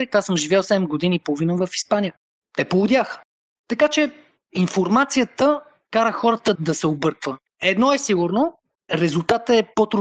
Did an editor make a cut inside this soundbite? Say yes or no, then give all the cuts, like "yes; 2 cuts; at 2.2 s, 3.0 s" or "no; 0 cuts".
yes; 1 cut; at 6.5 s